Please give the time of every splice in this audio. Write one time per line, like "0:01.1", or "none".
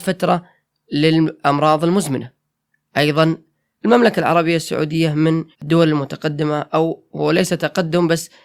0:05.5